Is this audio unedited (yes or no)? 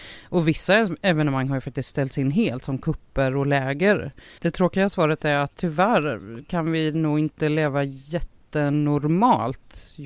no